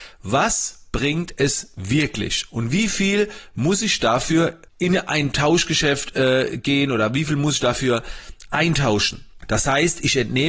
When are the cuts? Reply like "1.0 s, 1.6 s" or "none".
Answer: 4.7 s, 9.4 s